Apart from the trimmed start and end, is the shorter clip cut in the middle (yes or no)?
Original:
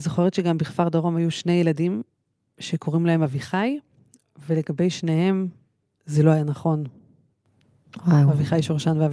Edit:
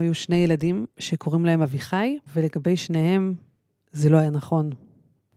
yes